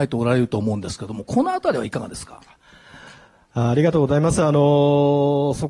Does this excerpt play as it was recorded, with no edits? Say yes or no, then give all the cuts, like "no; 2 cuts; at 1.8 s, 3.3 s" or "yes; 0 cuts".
yes; 0 cuts